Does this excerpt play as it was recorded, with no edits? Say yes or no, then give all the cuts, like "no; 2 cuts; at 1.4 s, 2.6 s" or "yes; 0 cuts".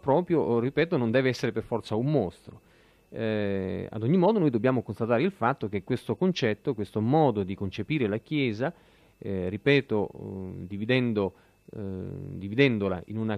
yes; 0 cuts